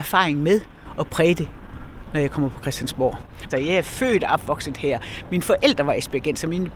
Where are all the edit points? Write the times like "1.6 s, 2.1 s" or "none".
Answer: 3.5 s